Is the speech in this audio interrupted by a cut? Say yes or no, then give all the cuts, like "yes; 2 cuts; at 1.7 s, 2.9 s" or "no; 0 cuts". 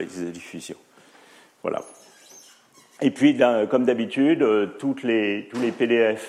no; 0 cuts